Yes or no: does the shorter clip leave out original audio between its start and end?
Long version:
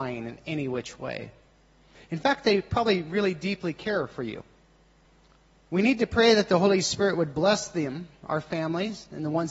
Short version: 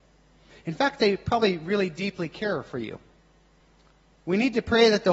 no